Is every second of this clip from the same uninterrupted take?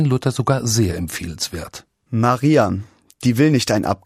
yes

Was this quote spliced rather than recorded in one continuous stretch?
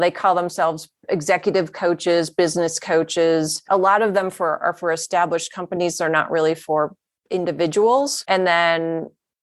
no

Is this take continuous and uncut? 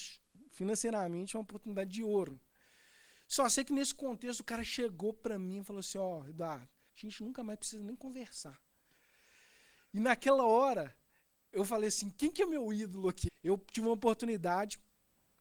no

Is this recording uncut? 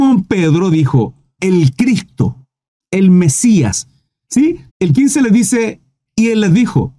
no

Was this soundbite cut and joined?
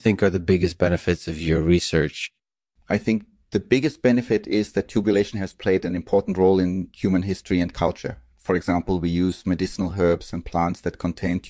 no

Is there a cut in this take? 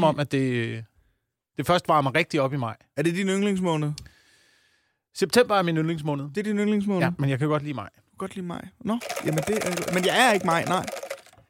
no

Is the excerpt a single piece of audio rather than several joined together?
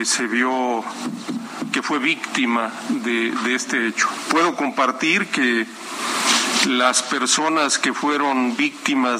yes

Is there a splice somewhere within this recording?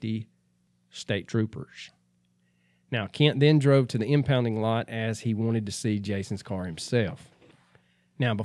no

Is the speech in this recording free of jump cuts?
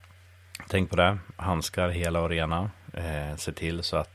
yes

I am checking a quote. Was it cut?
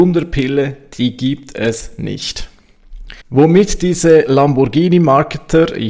yes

